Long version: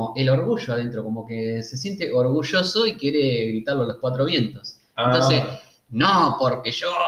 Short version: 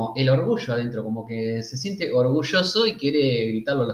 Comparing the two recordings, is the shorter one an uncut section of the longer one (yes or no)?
yes